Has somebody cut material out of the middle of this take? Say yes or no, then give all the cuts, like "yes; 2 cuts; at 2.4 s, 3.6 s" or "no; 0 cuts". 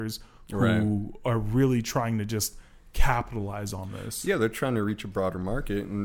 no; 0 cuts